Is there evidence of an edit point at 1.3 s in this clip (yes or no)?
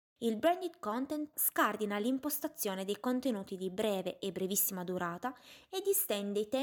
yes